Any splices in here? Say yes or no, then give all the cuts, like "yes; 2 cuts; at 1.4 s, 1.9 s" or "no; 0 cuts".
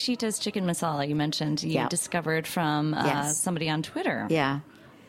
no; 0 cuts